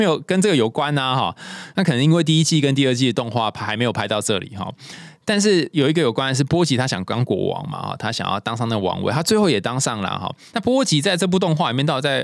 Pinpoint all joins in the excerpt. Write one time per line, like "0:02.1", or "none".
0:05.7
0:10.5